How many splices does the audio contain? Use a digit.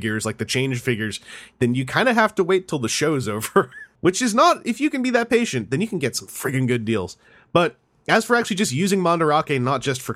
1